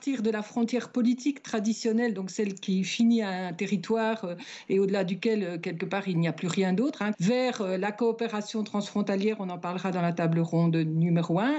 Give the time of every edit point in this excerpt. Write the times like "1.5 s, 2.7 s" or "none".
7.1 s

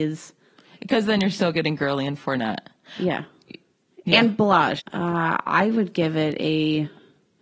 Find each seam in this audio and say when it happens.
4.8 s

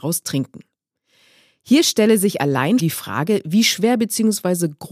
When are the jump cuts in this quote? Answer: 2.8 s

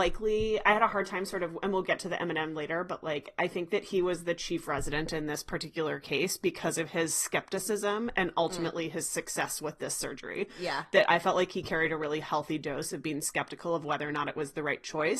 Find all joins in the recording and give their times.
none

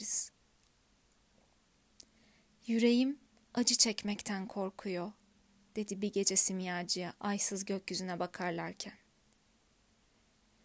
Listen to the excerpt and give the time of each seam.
none

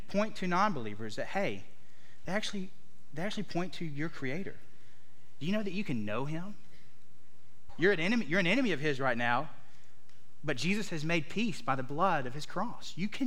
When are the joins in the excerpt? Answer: 2.3 s, 7.7 s

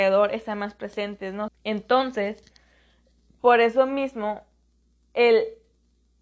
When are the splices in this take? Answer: 1.5 s

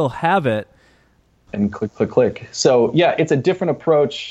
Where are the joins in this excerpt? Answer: 1.5 s

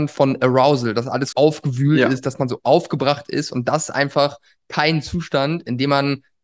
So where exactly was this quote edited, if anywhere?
1.3 s

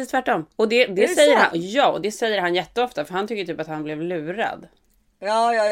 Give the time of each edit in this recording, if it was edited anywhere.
none

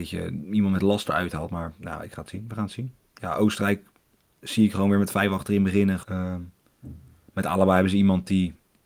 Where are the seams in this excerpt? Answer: 6.0 s

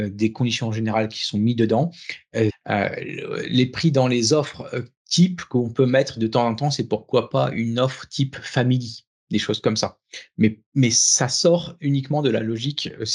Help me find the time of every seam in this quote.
2.5 s

